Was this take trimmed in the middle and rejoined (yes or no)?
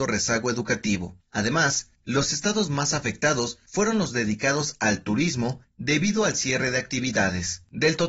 no